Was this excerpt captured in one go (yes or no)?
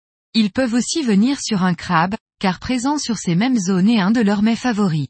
yes